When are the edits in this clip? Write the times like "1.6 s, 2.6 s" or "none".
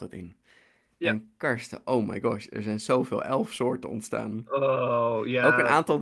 none